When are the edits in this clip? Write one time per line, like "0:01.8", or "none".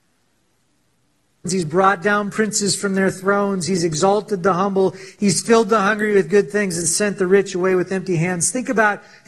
0:01.5